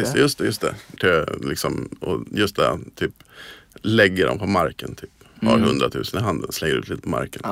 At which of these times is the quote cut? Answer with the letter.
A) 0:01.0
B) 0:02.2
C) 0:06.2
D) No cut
A